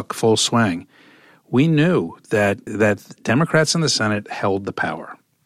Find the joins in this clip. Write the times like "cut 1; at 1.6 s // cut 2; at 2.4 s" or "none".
cut 1; at 2.7 s